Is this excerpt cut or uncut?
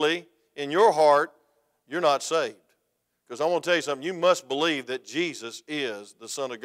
uncut